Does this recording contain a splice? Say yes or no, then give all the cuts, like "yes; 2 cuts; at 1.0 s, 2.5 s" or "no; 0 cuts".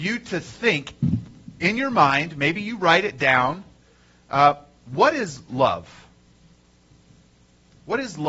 no; 0 cuts